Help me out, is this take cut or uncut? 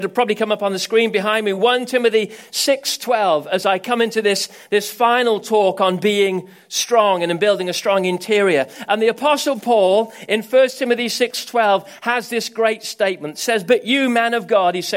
uncut